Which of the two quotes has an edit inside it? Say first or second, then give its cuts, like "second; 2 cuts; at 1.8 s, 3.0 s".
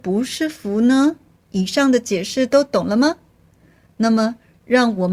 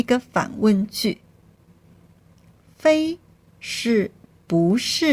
first; 1 cut; at 1.4 s